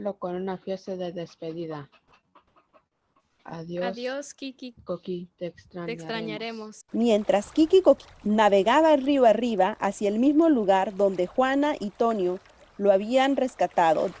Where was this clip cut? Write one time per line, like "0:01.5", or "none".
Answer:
0:04.7
0:06.9